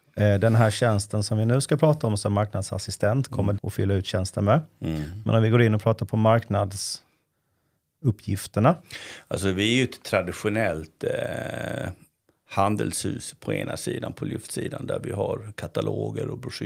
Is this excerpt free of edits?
no; 1 cut; at 3.6 s

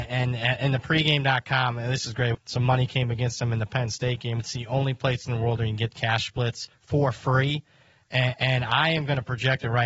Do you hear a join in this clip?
yes; 2 cuts; at 2.3 s, 4.4 s

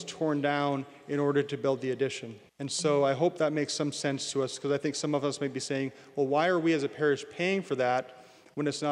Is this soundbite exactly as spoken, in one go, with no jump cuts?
no; 1 cut; at 2.5 s

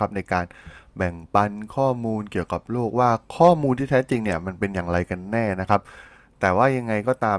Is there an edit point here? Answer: no; 0 cuts

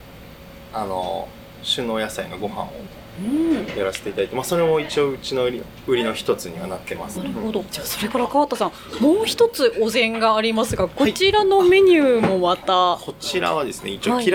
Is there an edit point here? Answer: yes; 1 cut; at 7.1 s

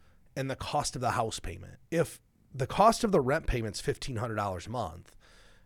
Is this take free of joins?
no; 1 cut; at 1.9 s

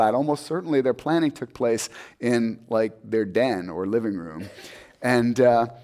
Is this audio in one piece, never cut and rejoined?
yes; 0 cuts

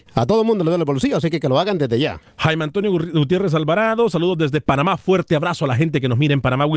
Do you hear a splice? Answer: no; 0 cuts

